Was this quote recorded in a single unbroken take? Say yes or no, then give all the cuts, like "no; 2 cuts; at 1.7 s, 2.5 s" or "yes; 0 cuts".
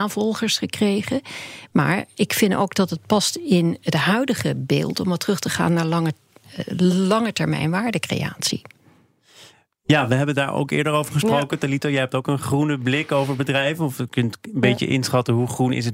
yes; 0 cuts